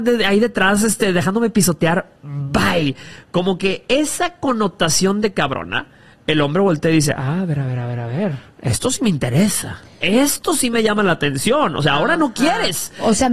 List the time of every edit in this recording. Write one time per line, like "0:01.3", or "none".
none